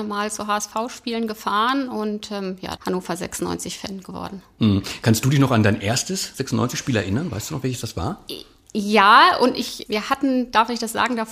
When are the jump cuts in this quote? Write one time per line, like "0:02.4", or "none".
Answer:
0:02.8
0:09.9

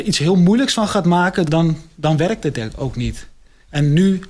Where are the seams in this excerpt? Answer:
0:01.5

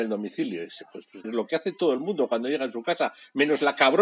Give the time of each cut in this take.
0:01.2

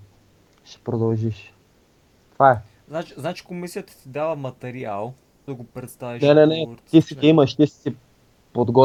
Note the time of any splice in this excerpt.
0:05.5

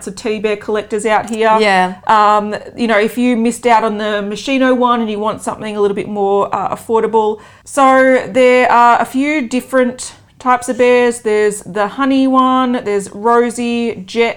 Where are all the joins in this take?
0:07.6

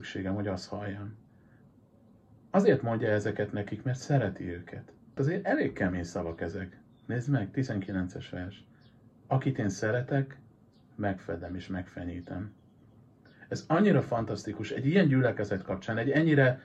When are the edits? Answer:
0:05.2

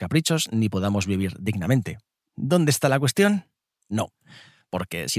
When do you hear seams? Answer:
0:03.7

